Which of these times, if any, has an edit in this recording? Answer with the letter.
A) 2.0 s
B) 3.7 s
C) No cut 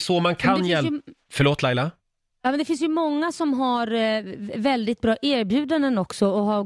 C